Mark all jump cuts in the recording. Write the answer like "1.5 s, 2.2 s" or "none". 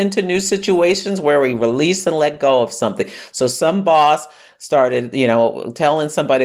none